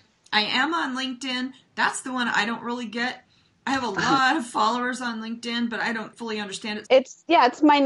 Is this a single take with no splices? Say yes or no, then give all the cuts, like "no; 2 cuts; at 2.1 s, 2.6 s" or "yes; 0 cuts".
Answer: no; 1 cut; at 6.8 s